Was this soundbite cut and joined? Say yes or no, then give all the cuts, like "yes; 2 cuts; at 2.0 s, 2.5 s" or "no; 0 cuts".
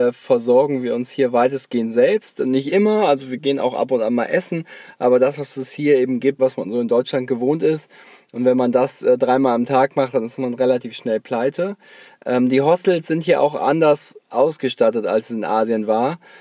yes; 1 cut; at 6.4 s